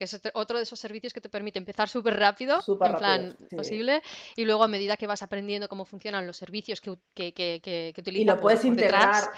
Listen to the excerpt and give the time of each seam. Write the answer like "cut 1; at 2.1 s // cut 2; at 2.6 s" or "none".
cut 1; at 3.5 s